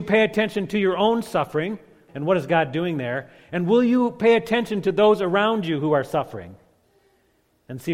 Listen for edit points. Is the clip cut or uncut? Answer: cut